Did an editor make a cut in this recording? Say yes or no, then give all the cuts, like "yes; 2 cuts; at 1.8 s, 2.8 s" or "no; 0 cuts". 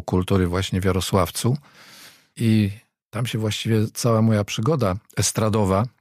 no; 0 cuts